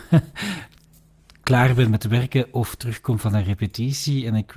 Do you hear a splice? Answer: no; 0 cuts

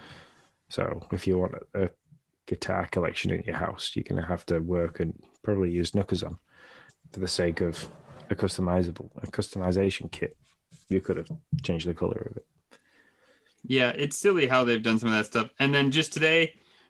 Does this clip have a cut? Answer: yes; 1 cut; at 6.9 s

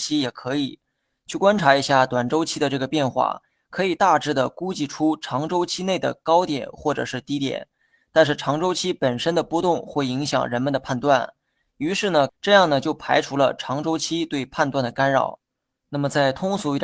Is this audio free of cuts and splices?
no; 1 cut; at 12.3 s

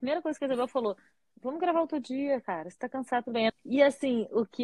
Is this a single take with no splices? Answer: no; 2 cuts; at 1.3 s, 3.5 s

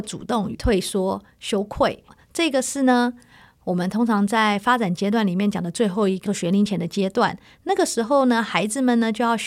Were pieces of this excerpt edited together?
no; 0 cuts

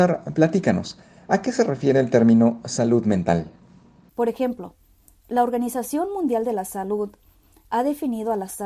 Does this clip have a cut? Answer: yes; 1 cut; at 4.1 s

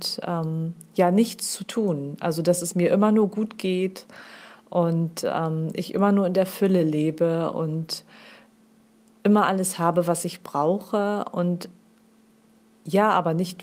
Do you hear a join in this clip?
no; 0 cuts

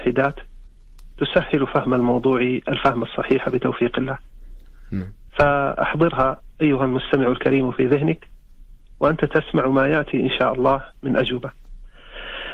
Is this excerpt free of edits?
yes; 0 cuts

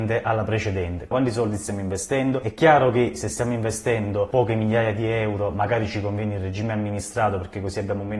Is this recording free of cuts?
no; 1 cut; at 1.1 s

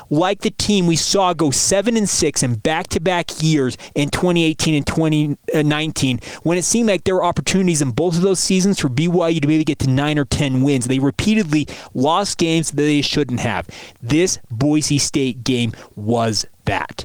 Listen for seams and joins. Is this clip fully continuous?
yes; 0 cuts

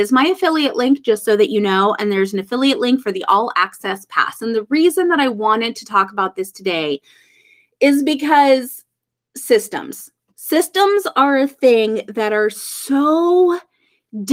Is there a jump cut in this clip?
no; 0 cuts

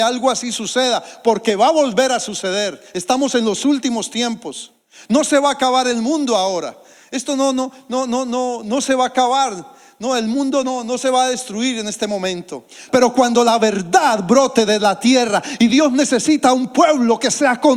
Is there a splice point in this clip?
yes; 1 cut; at 12.9 s

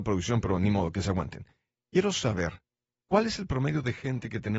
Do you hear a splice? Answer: no; 0 cuts

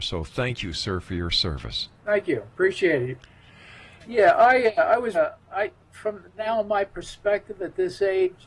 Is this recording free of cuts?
no; 3 cuts; at 2.0 s, 4.0 s, 5.1 s

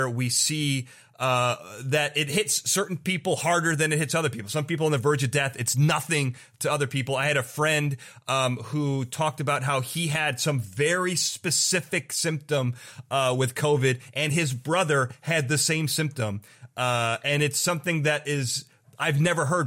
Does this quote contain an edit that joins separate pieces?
no; 0 cuts

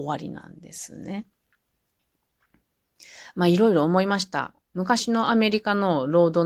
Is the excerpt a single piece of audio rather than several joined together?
yes; 0 cuts

